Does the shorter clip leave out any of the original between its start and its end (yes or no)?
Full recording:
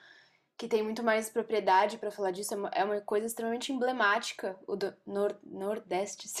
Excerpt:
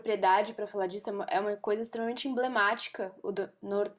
no